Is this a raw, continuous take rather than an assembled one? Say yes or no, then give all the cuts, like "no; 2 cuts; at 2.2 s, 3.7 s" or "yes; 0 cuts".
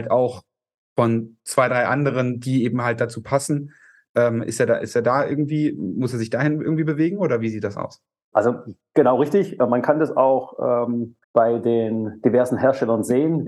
no; 2 cuts; at 8.3 s, 11.2 s